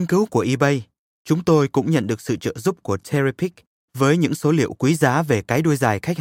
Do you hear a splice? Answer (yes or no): no